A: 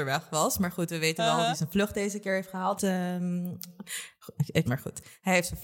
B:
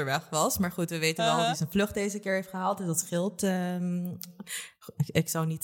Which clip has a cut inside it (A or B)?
A